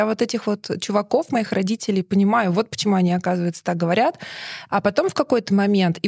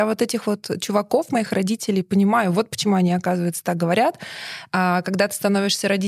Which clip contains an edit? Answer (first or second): first